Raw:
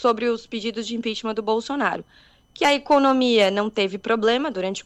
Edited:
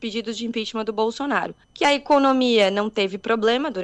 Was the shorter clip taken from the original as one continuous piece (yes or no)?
no